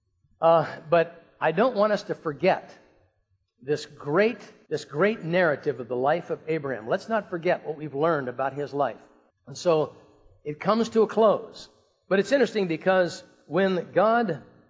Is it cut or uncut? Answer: cut